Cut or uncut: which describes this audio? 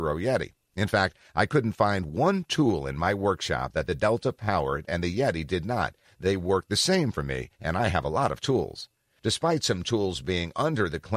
cut